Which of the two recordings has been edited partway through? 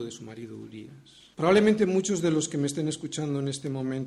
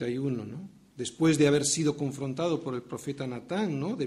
first; 1 cut; at 1.3 s

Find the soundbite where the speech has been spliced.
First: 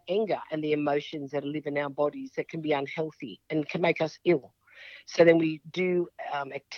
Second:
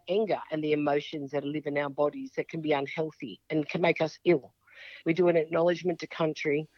second; 1 cut; at 5.0 s

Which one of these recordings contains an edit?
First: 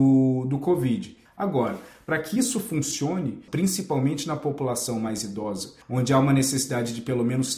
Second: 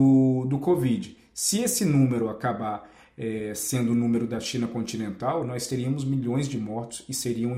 first; 3 cuts; at 1.3 s, 3.5 s, 5.8 s

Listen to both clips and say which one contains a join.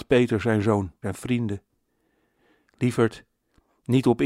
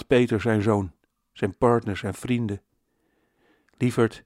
first; 1 cut; at 1.0 s

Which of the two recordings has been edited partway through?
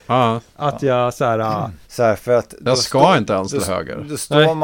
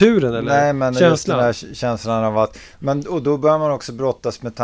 first; 1 cut; at 1.8 s

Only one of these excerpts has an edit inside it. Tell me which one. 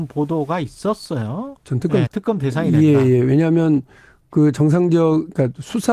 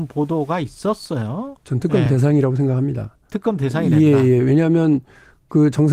first; 1 cut; at 2.1 s

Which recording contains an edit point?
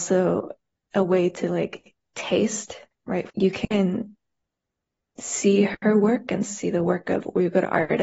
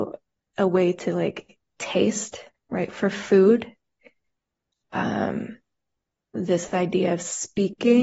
first; 1 cut; at 3.3 s

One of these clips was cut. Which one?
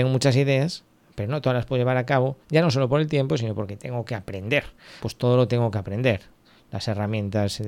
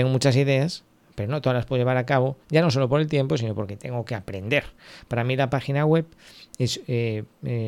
first; 1 cut; at 5.0 s

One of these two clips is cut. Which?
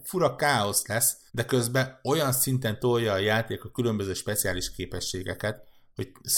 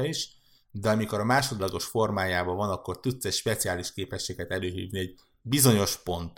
first; 1 cut; at 1.3 s

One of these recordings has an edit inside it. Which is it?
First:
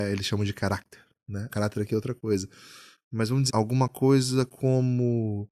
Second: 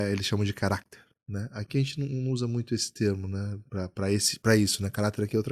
first; 2 cuts; at 1.5 s, 3.5 s

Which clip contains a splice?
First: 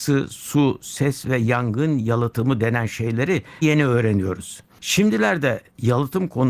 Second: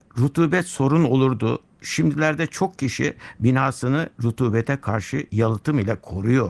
first; 1 cut; at 3.6 s

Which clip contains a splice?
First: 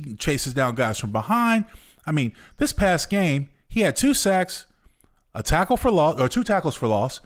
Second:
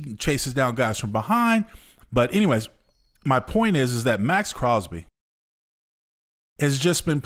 second; 1 cut; at 2.0 s

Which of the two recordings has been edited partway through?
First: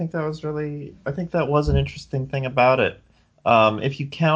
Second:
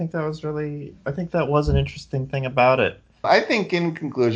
second; 1 cut; at 3.2 s

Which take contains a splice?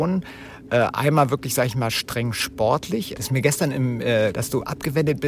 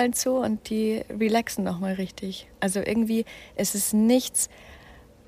first; 2 cuts; at 3.2 s, 4.3 s

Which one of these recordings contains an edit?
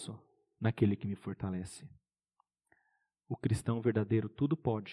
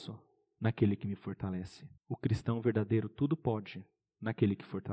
second; 1 cut; at 2.0 s

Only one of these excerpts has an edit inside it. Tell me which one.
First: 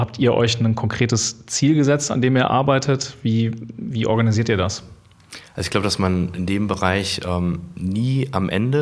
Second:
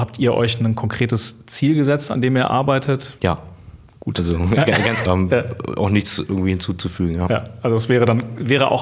second; 2 cuts; at 3.2 s, 5.1 s

